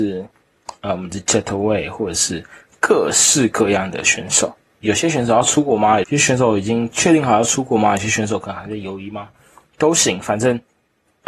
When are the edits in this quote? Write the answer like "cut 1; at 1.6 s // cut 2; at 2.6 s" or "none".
cut 1; at 6.0 s